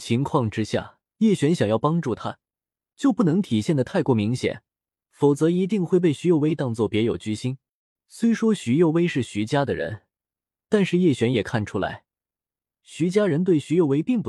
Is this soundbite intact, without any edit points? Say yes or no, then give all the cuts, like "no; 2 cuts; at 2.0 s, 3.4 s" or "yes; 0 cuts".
no; 2 cuts; at 1.1 s, 7.9 s